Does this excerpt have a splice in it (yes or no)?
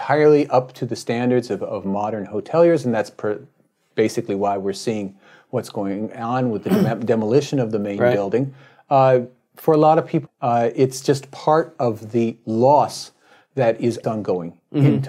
yes